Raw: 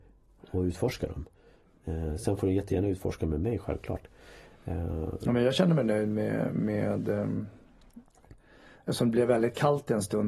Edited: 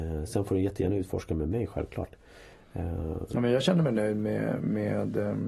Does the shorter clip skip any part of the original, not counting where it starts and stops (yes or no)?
no